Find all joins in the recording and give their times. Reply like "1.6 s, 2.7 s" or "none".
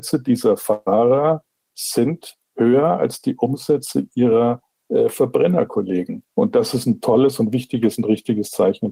6.3 s